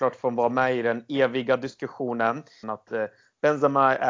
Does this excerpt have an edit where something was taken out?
yes; 1 cut; at 2.6 s

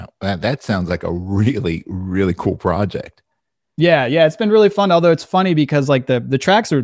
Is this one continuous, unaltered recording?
yes; 0 cuts

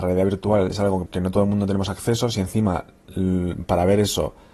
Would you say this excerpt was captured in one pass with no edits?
no; 1 cut; at 1.1 s

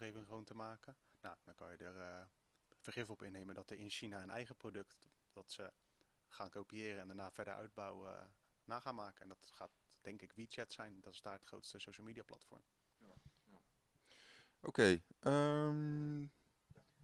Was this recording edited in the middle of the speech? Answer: no; 0 cuts

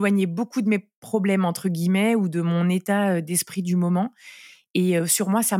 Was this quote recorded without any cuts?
yes; 0 cuts

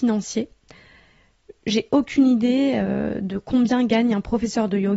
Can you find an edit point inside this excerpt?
no; 0 cuts

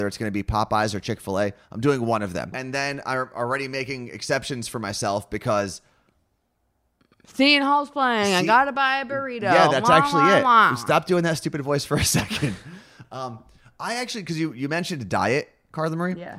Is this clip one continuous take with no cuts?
no; 2 cuts; at 2.5 s, 13.0 s

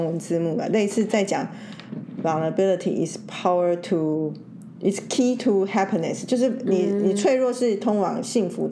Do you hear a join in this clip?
no; 0 cuts

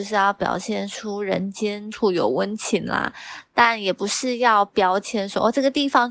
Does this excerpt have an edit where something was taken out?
yes; 1 cut; at 1.9 s

